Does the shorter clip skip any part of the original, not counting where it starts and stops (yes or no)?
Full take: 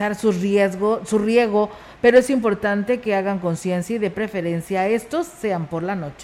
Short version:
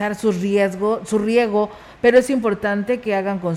no